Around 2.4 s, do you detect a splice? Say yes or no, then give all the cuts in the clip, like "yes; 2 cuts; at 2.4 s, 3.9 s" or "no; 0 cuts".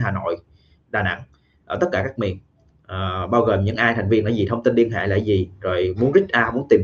no; 0 cuts